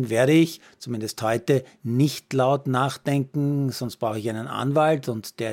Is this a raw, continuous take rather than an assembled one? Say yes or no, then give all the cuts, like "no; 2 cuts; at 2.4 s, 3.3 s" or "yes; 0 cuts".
yes; 0 cuts